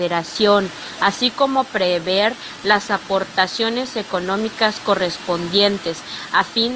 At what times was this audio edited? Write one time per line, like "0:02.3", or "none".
0:01.0